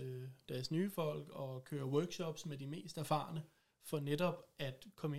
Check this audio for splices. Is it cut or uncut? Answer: uncut